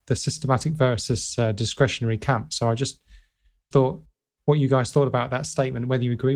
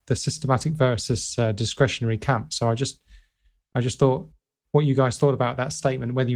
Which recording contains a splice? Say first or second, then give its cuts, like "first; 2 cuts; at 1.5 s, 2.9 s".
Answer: first; 1 cut; at 3.7 s